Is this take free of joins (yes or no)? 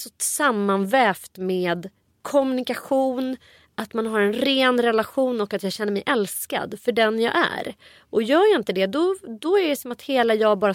yes